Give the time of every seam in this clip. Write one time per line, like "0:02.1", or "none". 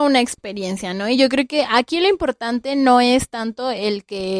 none